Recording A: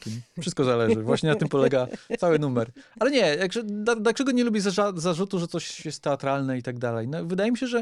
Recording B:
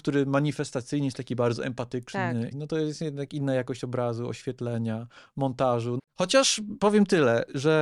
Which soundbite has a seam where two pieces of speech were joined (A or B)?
B